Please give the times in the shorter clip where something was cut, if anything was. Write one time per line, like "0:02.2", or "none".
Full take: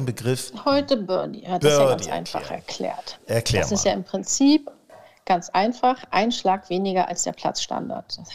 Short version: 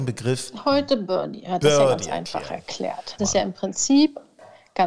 0:03.2